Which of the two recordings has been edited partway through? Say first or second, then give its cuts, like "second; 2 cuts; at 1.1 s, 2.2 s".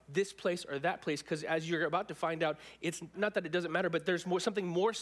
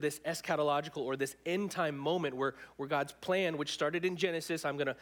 first; 1 cut; at 3.1 s